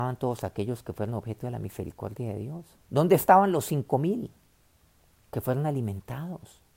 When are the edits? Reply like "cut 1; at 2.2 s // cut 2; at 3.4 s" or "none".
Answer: cut 1; at 2.9 s